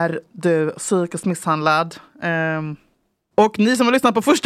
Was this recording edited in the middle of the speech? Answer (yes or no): yes